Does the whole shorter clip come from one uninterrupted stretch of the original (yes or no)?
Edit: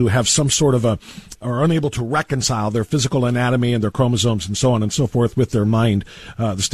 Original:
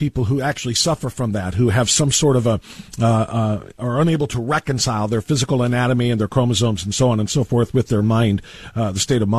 no